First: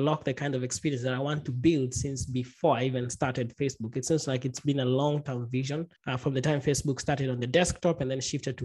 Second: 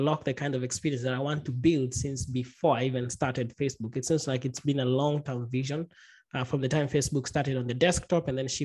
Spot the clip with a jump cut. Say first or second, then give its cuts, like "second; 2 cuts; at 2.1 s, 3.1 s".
first; 1 cut; at 6.0 s